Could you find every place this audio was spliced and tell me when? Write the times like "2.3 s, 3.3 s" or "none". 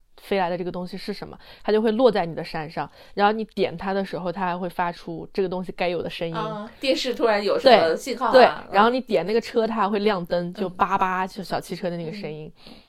none